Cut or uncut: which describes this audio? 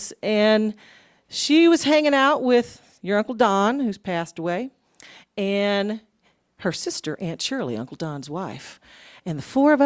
uncut